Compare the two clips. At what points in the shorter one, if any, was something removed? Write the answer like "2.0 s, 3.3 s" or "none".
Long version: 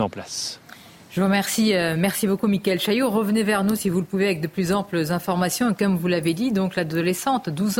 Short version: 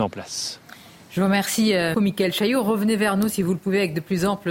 1.9 s

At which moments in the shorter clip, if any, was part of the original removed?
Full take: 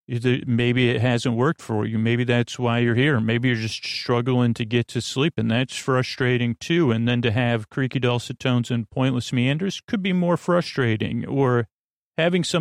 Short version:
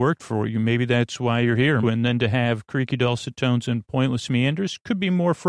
1.8 s

